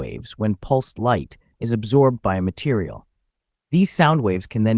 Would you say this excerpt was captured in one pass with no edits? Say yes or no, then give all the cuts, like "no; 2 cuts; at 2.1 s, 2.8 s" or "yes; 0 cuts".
no; 1 cut; at 1.5 s